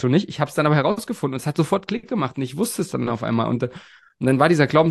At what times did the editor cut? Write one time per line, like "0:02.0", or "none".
none